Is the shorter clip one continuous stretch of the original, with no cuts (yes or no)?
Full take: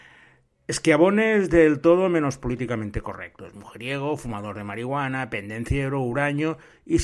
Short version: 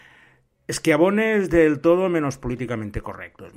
yes